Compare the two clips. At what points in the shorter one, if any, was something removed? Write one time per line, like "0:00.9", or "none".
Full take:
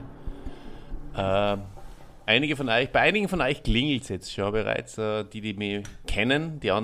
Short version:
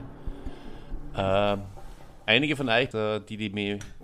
0:02.9